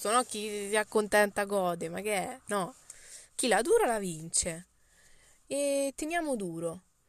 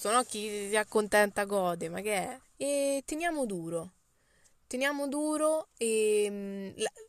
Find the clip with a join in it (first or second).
second